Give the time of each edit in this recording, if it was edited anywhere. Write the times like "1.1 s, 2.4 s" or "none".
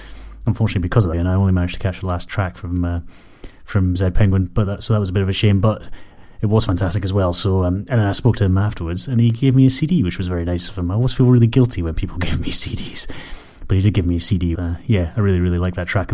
1.1 s, 14.6 s